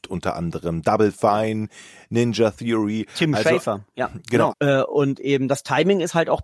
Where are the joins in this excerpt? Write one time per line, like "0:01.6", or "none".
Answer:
0:04.5